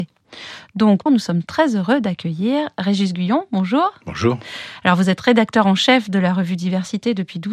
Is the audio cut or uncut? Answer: cut